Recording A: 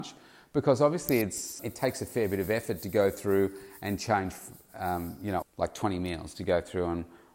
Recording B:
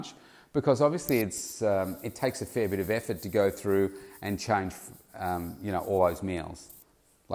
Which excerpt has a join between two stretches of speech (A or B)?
A